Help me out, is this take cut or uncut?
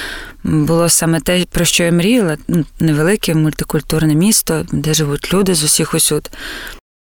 uncut